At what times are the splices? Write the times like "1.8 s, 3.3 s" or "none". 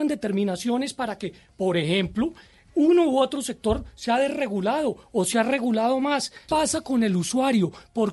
6.5 s